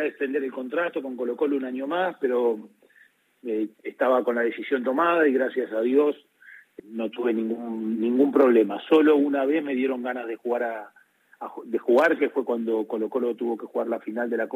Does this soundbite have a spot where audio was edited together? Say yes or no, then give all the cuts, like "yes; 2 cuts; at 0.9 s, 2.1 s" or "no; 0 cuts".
yes; 1 cut; at 6.8 s